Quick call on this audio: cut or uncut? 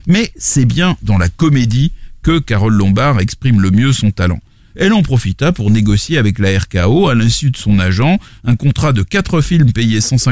cut